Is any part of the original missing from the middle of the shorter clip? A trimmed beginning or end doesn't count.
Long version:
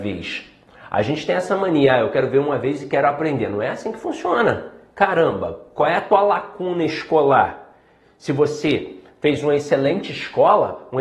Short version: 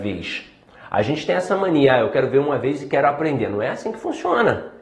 no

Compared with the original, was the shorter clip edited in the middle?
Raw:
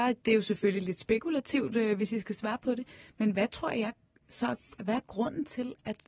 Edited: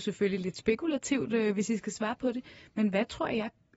no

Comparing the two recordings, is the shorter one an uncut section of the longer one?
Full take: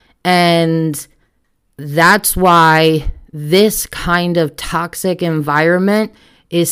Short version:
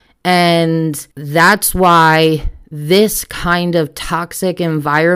no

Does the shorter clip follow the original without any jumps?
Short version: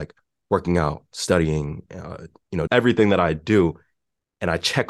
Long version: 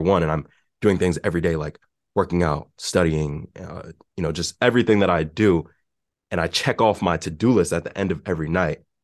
no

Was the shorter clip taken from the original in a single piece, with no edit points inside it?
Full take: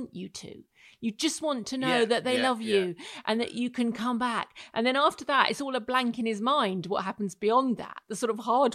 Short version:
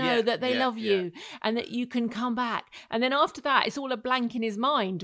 yes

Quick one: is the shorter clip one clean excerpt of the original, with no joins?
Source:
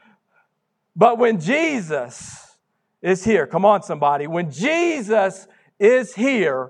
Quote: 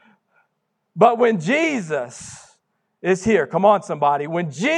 yes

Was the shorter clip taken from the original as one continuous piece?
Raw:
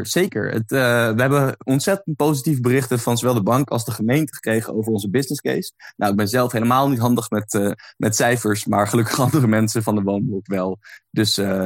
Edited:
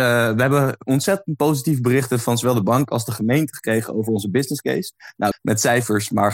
no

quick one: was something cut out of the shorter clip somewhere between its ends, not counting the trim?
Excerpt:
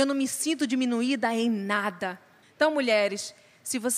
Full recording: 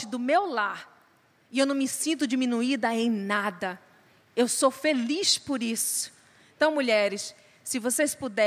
yes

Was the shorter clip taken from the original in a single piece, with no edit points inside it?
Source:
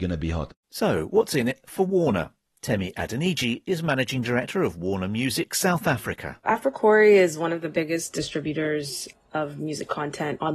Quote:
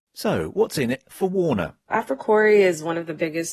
no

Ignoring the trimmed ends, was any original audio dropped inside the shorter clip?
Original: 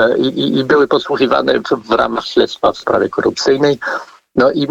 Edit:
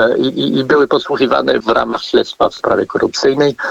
yes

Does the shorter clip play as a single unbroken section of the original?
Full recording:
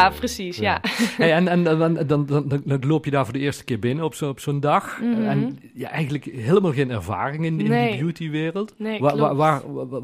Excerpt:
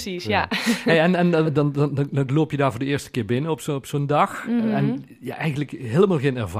no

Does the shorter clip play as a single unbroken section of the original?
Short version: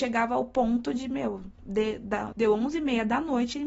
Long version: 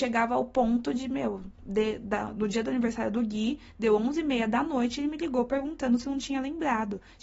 no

